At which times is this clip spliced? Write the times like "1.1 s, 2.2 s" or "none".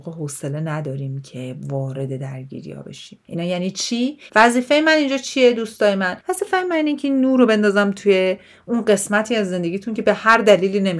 4.3 s